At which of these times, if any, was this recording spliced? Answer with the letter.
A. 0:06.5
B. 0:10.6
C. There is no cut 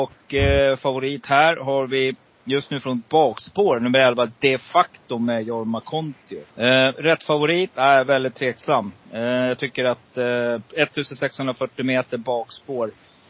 A